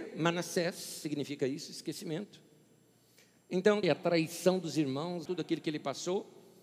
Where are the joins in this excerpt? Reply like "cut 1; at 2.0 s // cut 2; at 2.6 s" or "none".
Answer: cut 1; at 3.8 s // cut 2; at 5.3 s